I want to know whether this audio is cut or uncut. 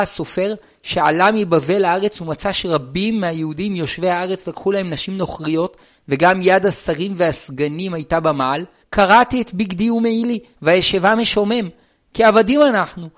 cut